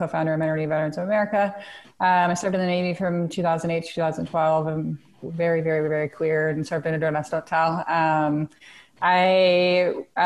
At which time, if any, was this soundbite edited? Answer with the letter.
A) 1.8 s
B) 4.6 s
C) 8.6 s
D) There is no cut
D